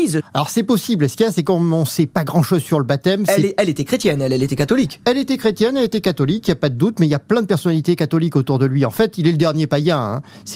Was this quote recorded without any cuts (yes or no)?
yes